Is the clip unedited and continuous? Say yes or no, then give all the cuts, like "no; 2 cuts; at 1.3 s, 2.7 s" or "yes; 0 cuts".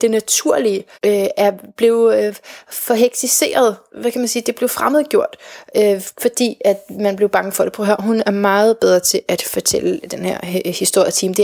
no; 1 cut; at 0.9 s